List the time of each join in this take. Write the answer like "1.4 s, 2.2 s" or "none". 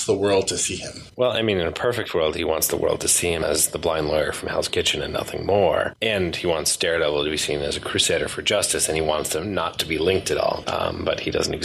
1.1 s

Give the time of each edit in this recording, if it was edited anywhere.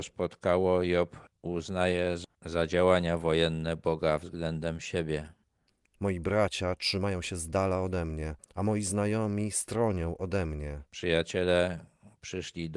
10.9 s

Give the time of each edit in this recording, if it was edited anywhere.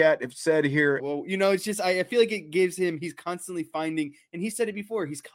1.0 s

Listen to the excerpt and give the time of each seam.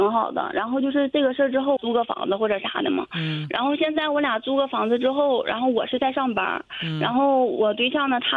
1.8 s

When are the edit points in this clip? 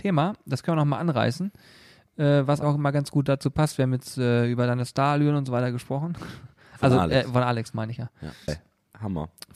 2.6 s, 8.5 s

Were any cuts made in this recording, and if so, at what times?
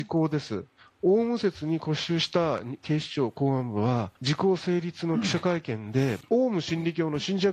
4.2 s, 6.2 s

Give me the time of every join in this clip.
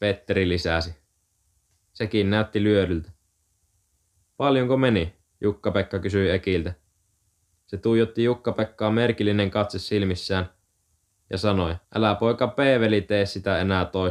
7.6 s, 11.8 s

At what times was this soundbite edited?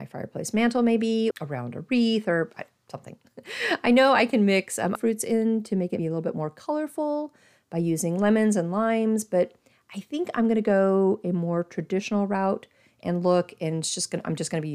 1.3 s, 4.9 s, 6.0 s

